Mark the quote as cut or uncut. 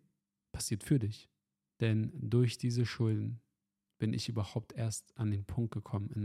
cut